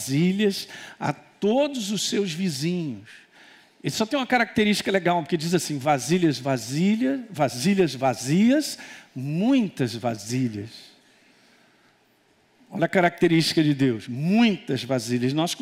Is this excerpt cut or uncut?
uncut